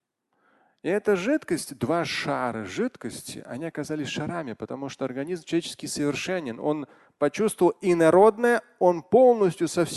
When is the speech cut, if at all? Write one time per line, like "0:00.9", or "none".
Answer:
none